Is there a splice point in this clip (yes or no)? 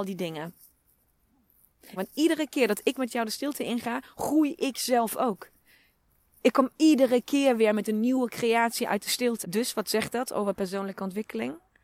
yes